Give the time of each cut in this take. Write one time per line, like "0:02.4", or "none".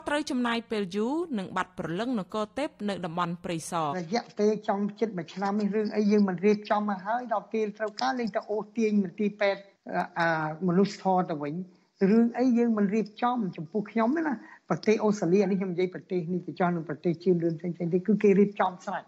0:03.9